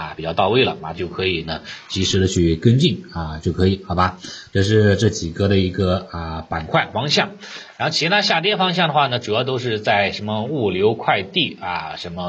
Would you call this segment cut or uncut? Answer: cut